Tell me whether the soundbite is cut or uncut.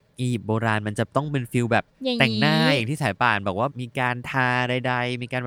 uncut